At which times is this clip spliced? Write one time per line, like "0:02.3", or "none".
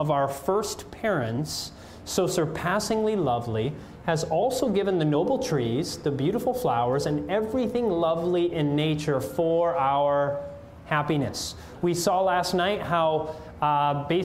none